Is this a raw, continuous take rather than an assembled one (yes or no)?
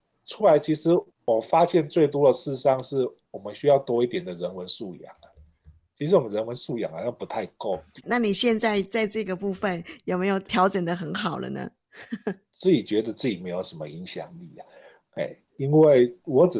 no